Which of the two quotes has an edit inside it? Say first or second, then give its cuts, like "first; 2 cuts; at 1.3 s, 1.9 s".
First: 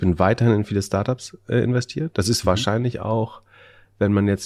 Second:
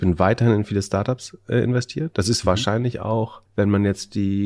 second; 1 cut; at 3.5 s